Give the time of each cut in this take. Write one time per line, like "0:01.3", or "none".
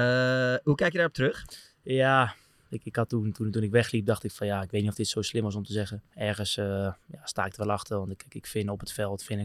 0:06.1